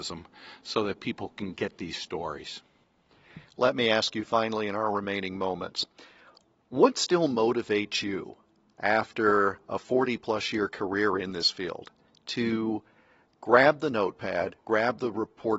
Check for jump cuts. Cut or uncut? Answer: uncut